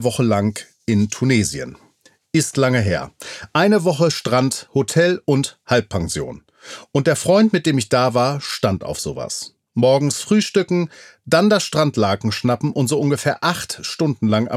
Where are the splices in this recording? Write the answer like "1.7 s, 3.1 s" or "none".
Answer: none

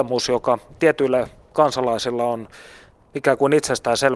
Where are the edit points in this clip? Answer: none

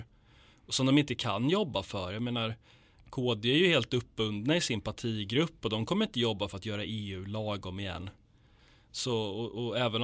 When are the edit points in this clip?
none

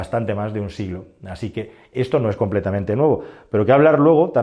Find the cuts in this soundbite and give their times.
none

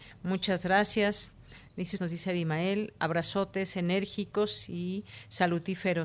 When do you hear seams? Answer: 2.0 s

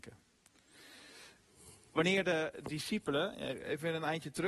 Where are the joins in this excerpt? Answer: none

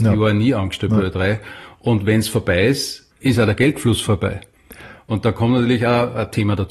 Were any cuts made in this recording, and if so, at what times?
3.1 s

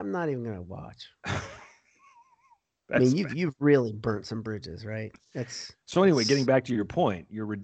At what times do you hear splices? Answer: 5.8 s

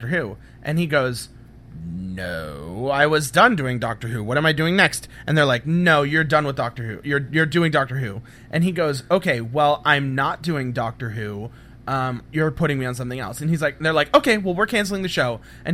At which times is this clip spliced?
none

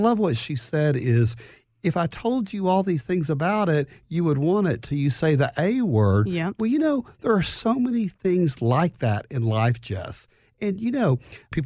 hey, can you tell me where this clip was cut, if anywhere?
none

